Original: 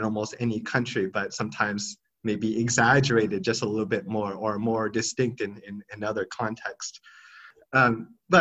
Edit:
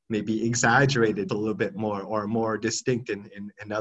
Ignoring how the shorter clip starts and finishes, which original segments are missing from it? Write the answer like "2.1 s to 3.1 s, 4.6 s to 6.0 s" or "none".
3.4 s to 3.6 s